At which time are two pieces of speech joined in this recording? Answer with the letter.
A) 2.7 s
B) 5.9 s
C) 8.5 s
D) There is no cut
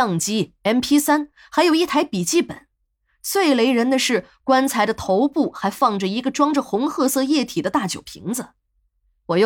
D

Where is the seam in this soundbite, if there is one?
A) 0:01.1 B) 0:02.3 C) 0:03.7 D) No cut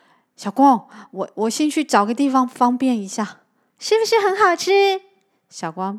C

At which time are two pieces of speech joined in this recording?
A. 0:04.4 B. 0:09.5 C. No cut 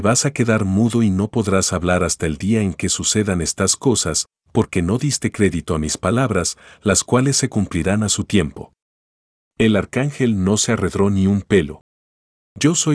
B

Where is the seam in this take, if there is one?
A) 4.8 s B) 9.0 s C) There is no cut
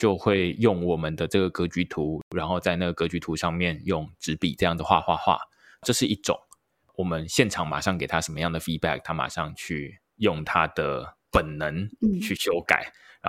C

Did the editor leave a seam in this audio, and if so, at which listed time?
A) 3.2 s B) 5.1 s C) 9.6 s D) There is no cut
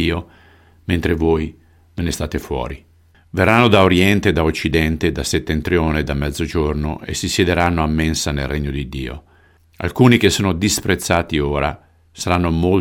C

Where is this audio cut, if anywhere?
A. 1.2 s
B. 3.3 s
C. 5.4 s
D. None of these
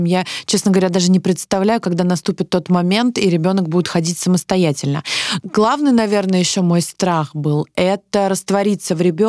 C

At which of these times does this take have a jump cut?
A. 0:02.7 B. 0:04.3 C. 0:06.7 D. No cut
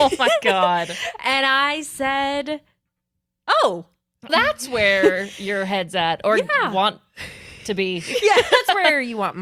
B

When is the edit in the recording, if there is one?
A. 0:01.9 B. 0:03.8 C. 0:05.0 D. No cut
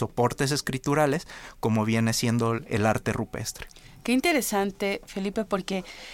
D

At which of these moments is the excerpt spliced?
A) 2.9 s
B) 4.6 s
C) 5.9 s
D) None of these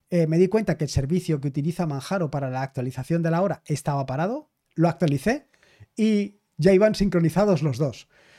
B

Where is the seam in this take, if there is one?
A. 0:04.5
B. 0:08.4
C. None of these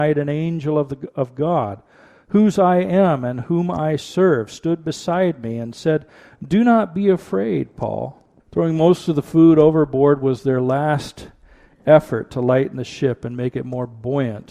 B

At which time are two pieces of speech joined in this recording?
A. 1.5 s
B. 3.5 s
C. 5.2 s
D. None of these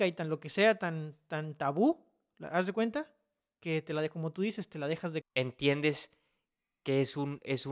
C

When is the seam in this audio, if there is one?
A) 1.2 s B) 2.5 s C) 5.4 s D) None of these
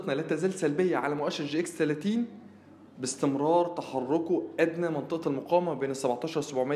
D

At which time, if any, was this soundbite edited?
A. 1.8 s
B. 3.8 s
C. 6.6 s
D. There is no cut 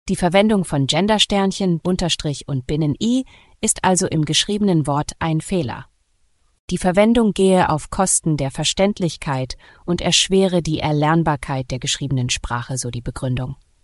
A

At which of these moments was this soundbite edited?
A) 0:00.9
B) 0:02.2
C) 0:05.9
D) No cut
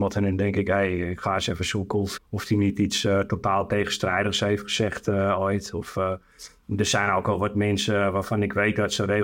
B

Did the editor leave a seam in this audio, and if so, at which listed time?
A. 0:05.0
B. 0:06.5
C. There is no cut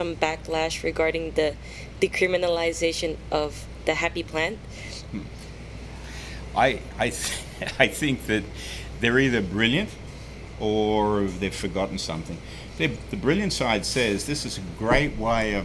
A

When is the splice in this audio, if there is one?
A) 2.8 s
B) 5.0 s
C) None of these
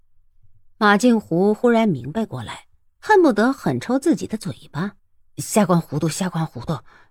B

